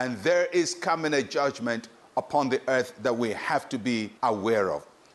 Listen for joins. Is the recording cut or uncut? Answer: cut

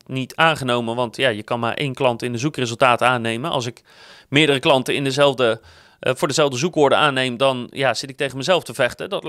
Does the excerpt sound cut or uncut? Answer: uncut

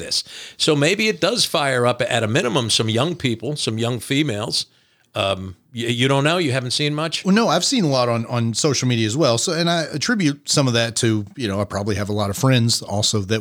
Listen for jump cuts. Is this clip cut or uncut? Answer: uncut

